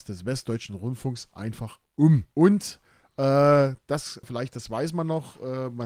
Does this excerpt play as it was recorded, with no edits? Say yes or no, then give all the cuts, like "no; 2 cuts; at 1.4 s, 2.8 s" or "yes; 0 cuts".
no; 2 cuts; at 2.3 s, 4.2 s